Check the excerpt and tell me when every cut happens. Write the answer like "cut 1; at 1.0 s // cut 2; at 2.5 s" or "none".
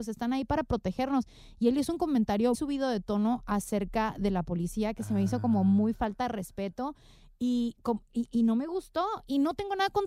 cut 1; at 2.5 s